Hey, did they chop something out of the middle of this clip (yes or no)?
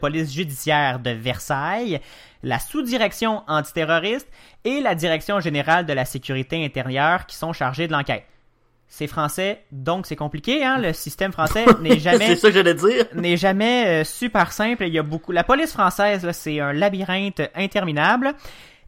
no